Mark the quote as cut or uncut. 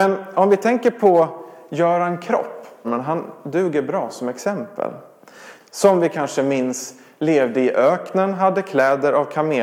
cut